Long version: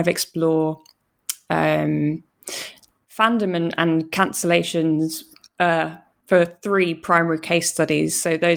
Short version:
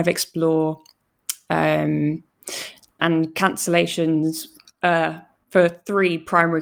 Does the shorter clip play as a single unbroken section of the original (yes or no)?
no